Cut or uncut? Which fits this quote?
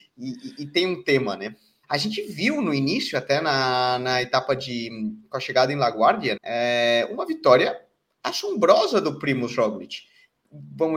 cut